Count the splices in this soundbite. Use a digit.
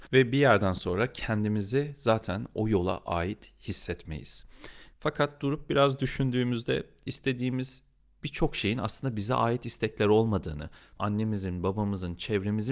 2